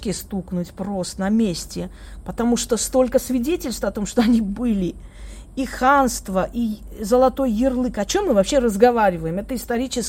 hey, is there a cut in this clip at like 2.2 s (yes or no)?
no